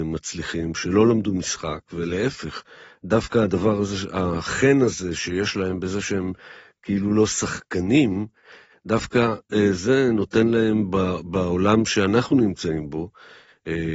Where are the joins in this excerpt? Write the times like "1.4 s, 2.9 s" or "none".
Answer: none

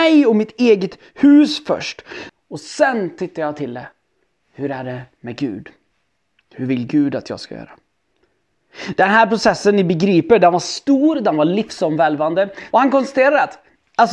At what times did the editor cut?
2.3 s, 12.7 s

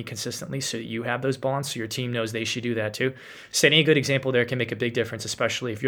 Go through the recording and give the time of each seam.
none

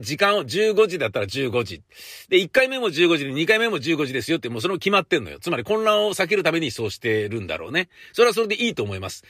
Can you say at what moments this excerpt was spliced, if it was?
none

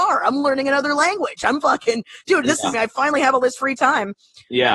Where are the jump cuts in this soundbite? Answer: 2.7 s

